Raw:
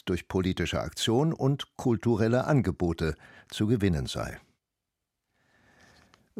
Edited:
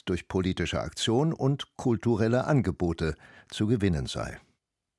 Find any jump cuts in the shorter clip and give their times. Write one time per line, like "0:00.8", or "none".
none

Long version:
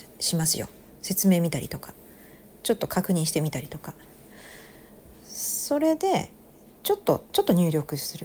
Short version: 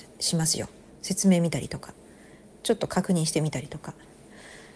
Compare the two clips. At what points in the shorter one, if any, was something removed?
none

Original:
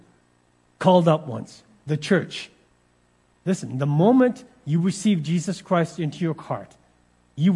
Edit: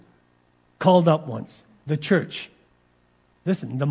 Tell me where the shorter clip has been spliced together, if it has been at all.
none

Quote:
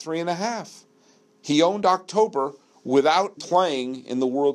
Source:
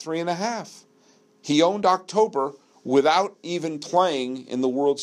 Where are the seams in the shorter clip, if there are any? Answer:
0:03.4

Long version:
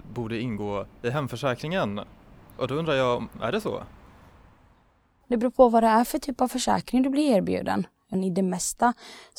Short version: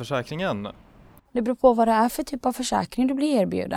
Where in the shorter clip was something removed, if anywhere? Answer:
0:01.2

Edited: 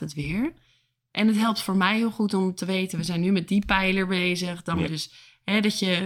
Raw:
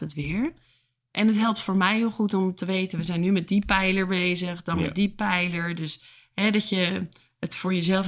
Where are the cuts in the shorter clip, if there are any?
0:04.9

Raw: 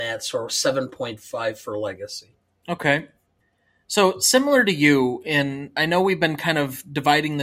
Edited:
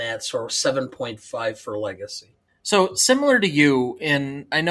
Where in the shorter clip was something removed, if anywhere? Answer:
0:02.5

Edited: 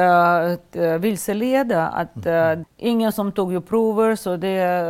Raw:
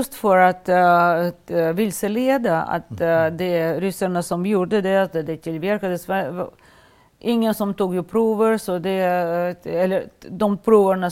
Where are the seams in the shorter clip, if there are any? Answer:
0:02.6

